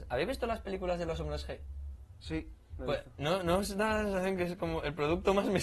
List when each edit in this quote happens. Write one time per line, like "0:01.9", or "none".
none